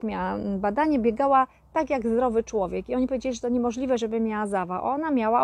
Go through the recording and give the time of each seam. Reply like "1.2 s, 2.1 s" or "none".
none